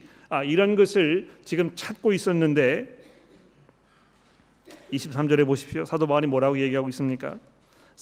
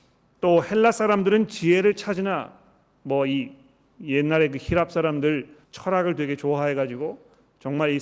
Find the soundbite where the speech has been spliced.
second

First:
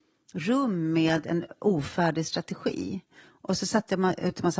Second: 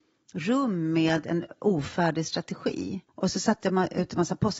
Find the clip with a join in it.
second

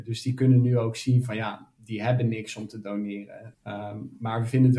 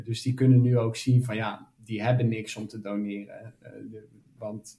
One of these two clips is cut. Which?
first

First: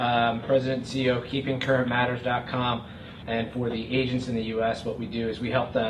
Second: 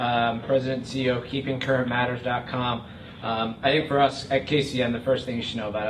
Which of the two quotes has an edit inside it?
first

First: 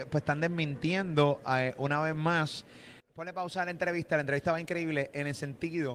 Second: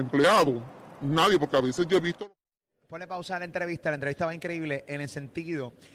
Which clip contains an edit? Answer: first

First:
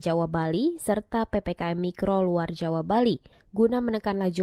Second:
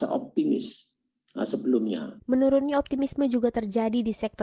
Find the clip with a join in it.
second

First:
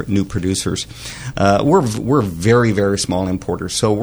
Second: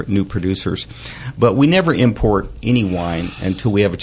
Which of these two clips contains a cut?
first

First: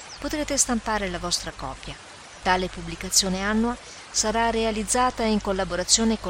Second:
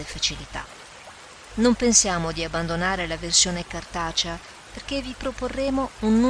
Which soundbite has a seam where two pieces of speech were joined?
first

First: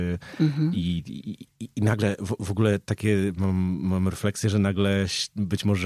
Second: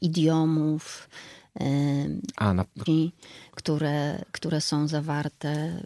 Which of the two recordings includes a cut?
second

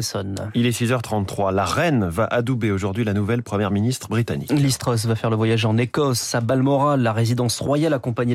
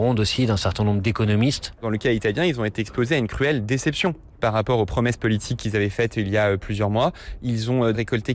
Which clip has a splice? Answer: second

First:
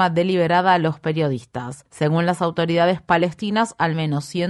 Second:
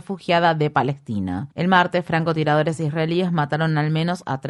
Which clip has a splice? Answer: second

